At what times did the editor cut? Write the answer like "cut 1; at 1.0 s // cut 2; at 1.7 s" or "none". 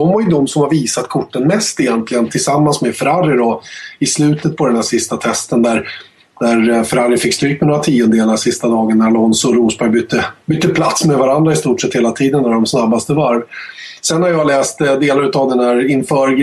none